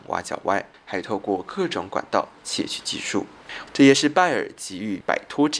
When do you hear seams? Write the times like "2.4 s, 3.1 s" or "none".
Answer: 3.7 s